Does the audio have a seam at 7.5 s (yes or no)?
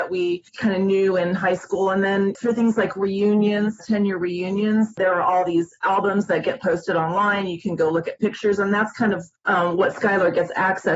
no